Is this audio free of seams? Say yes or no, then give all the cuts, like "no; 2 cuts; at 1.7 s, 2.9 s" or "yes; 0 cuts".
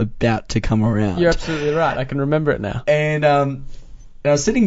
yes; 0 cuts